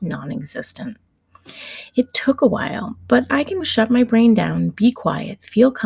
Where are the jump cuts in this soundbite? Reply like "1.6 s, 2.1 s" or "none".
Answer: 3.6 s